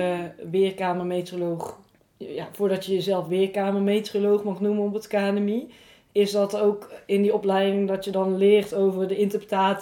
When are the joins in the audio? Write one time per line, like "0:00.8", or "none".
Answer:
none